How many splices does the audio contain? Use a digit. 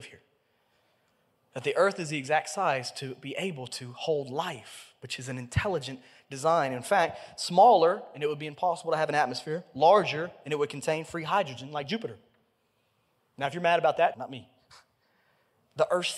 1